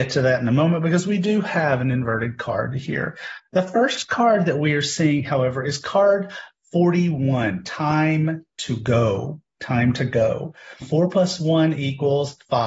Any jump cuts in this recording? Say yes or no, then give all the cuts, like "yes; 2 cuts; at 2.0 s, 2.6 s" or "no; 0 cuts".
yes; 1 cut; at 10.8 s